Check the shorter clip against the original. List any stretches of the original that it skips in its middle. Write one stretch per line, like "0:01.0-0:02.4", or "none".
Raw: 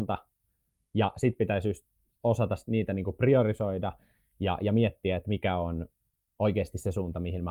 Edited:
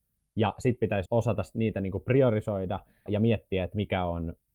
0:01.6-0:02.2
0:04.2-0:04.6